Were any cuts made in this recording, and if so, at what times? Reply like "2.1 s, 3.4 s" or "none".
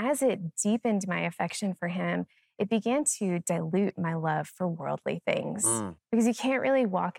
none